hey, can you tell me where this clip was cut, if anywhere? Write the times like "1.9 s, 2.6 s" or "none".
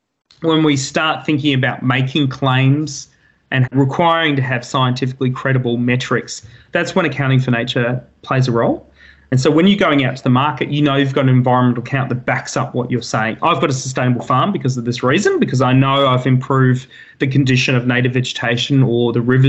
none